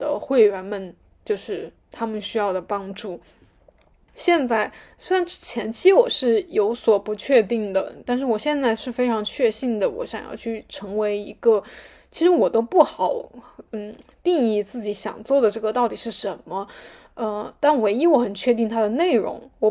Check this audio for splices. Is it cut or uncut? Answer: cut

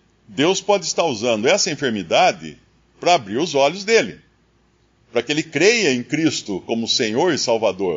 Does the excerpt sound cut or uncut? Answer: uncut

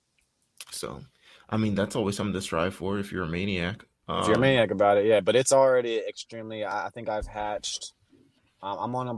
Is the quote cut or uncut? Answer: uncut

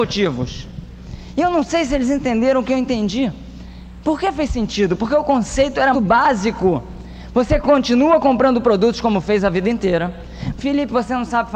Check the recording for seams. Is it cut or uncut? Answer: cut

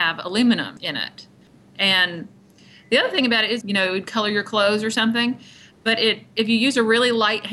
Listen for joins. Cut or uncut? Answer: cut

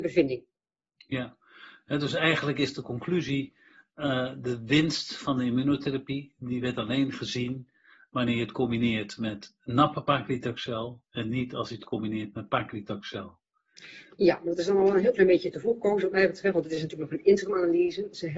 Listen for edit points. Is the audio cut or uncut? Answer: cut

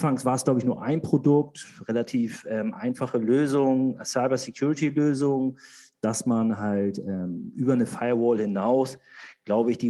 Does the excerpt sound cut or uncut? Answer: uncut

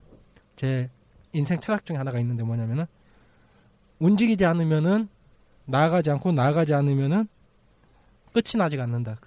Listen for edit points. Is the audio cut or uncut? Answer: uncut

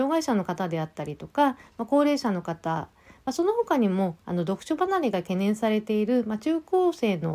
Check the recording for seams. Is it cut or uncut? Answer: uncut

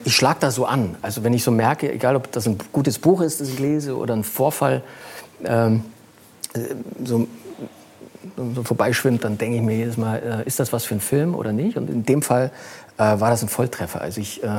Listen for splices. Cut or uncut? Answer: uncut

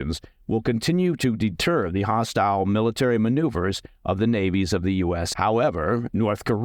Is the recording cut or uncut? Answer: cut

